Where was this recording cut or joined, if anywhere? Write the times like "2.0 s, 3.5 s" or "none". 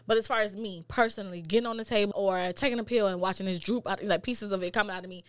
2.1 s